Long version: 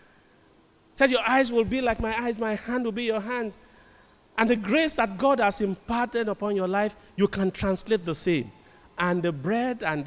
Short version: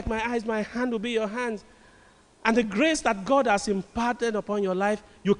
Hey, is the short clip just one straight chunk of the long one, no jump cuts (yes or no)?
yes